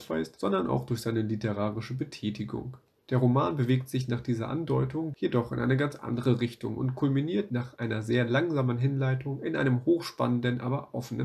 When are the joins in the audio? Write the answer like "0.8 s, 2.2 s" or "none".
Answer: 5.1 s